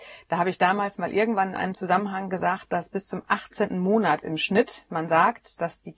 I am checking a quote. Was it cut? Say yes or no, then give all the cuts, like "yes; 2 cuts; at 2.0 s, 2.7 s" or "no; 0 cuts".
no; 0 cuts